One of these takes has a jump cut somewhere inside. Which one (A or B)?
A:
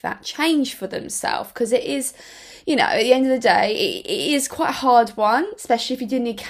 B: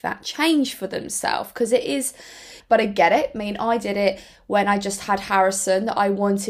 B